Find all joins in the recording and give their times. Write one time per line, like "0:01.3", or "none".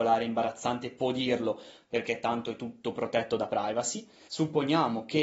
0:04.3